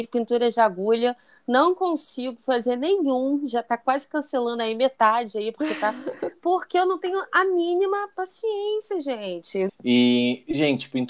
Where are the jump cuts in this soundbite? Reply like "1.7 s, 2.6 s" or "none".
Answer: 9.7 s